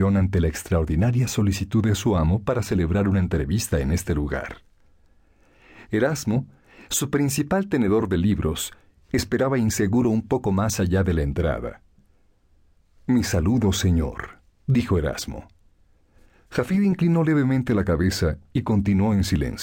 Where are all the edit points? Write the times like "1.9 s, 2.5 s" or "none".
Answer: 5.9 s